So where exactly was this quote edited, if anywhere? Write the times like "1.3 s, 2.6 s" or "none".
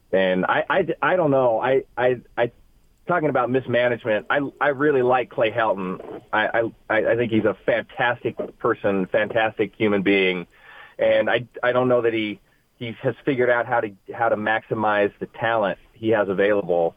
none